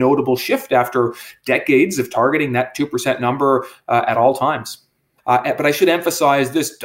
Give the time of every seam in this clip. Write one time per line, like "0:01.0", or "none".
0:05.2